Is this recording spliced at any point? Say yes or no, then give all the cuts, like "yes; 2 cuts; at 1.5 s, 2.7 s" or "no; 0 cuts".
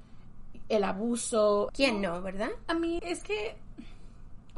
yes; 2 cuts; at 1.7 s, 3.0 s